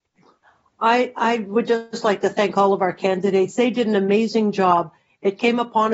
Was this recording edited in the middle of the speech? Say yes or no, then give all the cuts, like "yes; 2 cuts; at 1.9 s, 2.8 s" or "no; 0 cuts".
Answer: no; 0 cuts